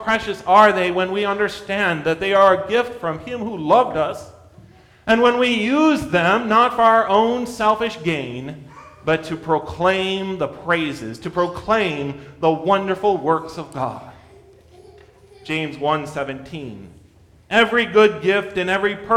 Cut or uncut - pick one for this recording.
uncut